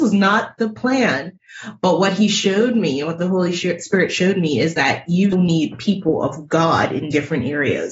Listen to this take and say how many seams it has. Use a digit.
1